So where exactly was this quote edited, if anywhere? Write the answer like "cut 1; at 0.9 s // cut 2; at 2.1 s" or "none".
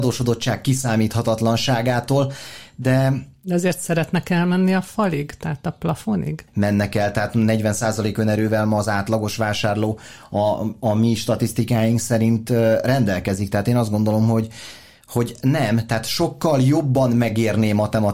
cut 1; at 6.5 s

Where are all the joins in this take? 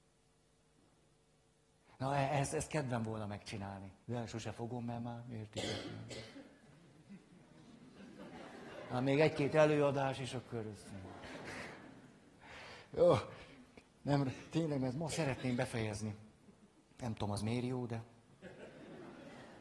cut 1; at 4.0 s

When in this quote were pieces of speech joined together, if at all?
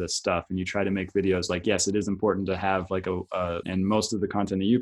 cut 1; at 3.6 s

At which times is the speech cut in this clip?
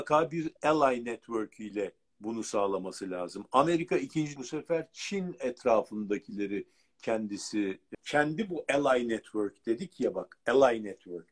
cut 1; at 4.4 s // cut 2; at 7.9 s

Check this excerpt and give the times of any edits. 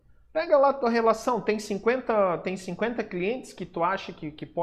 none

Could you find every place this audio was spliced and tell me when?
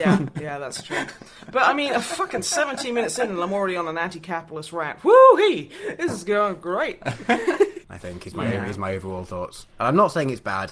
cut 1; at 7.8 s

